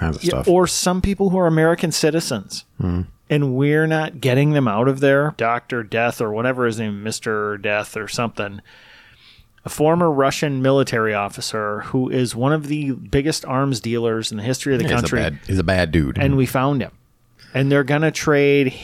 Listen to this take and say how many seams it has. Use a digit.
2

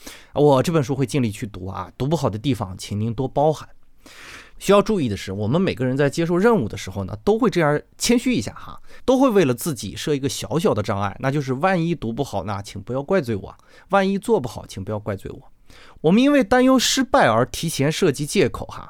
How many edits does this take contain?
1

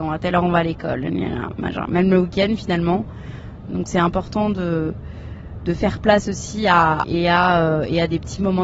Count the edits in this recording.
3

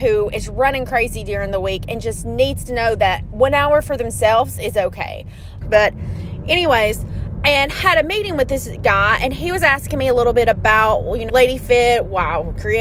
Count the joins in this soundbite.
2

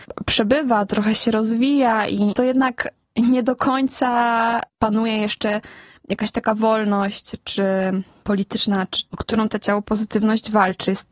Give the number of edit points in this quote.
2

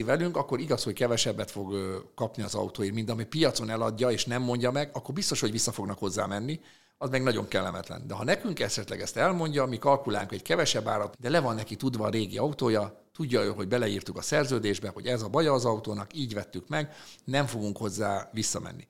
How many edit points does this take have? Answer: 1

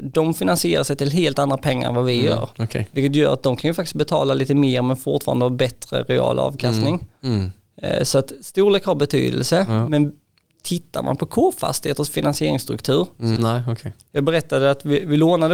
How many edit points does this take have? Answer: 1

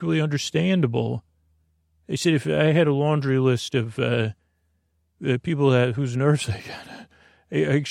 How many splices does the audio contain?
0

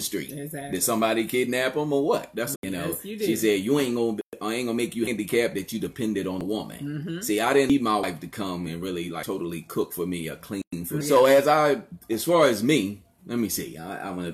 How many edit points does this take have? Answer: 3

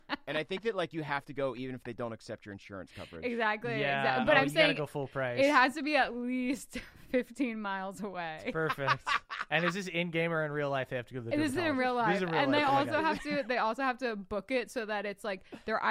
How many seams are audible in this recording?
0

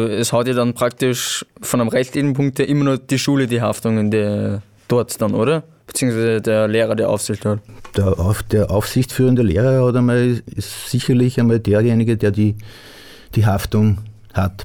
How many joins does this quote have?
0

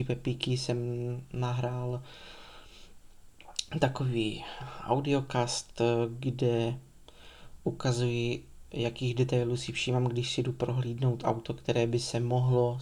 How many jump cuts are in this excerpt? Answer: 0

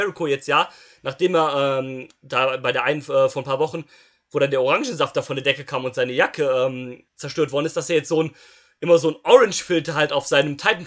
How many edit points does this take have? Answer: 1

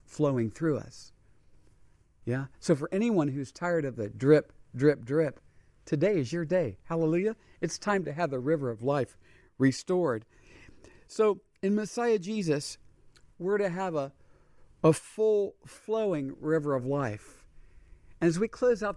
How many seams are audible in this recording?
0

